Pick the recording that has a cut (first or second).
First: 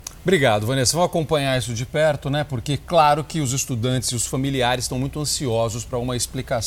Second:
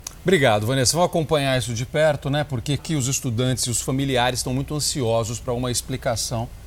second